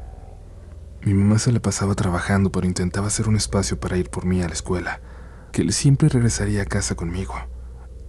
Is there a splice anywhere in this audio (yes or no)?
yes